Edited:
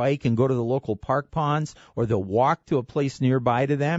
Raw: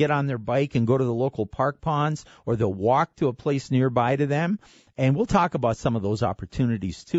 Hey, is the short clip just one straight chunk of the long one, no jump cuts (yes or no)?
yes